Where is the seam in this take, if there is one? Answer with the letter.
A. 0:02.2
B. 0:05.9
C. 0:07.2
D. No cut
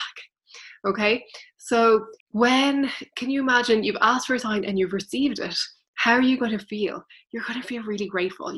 A